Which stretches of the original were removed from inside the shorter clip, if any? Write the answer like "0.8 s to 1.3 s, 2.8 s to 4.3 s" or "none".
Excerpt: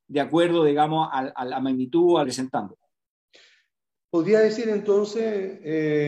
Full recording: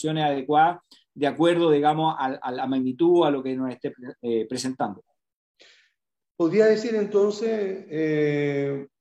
3.3 s to 4.5 s